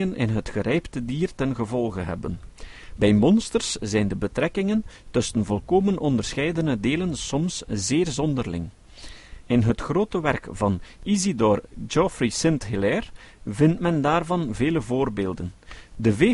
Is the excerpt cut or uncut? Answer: uncut